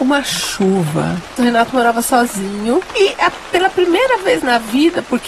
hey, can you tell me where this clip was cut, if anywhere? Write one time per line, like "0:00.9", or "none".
0:01.4